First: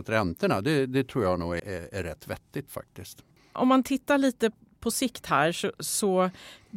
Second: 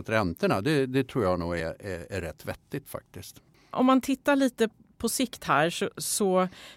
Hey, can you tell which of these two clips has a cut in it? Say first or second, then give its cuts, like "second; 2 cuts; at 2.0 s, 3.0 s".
first; 1 cut; at 1.6 s